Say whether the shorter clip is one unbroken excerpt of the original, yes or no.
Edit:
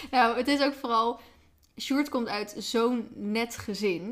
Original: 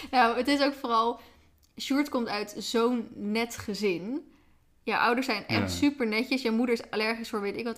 yes